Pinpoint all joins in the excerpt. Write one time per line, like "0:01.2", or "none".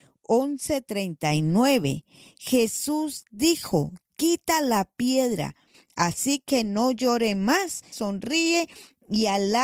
0:05.7
0:07.9